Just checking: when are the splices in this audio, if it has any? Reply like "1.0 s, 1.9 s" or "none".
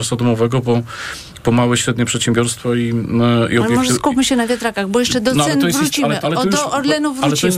6.2 s